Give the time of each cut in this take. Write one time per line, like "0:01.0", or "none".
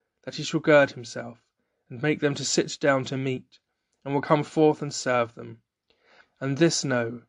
0:06.2